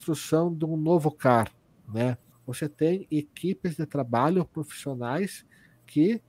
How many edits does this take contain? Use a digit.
1